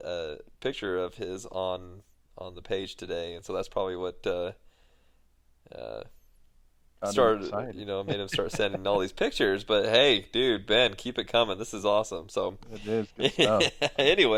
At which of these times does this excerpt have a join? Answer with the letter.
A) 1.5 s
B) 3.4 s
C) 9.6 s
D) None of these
D